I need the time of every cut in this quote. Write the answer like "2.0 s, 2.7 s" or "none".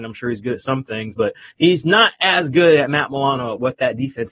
none